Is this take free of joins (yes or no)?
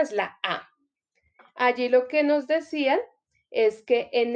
no